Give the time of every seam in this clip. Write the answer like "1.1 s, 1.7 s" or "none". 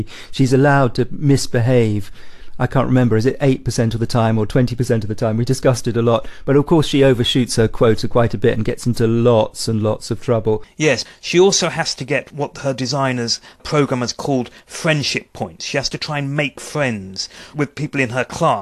none